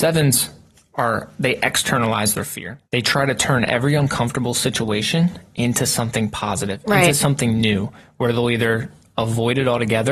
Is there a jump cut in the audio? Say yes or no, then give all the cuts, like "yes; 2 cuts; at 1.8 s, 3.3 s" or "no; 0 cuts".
yes; 1 cut; at 2.9 s